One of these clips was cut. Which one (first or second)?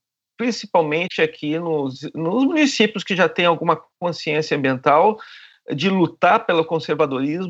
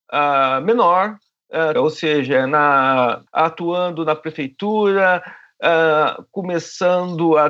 second